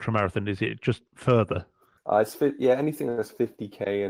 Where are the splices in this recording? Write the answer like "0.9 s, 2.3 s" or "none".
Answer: none